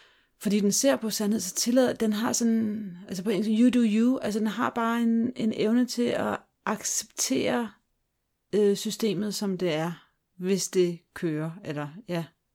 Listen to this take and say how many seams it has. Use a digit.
0